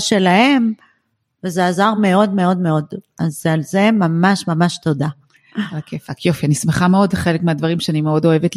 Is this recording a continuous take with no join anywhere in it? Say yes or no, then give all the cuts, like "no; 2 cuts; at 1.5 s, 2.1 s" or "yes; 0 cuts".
yes; 0 cuts